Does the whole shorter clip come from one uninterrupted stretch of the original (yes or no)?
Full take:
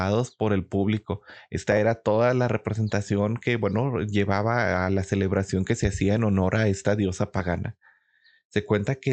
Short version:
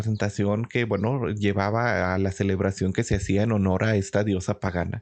yes